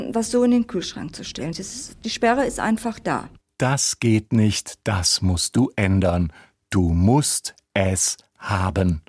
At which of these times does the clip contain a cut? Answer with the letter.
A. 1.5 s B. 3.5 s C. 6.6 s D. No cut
A